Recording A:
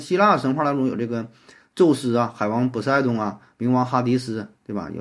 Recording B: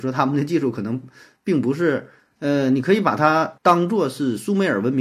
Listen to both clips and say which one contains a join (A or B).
B